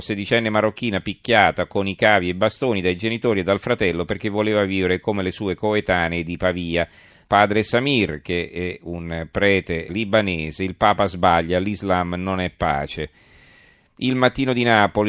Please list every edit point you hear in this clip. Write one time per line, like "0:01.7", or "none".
0:07.2
0:09.9